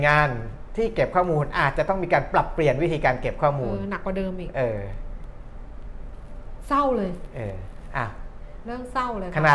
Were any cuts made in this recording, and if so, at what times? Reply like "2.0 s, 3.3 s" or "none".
none

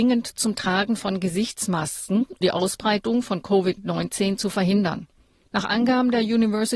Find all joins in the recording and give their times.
2.4 s, 5.5 s

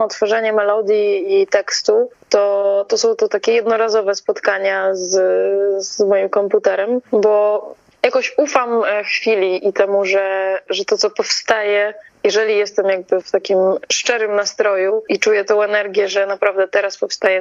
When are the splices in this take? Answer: 13.2 s, 15.1 s

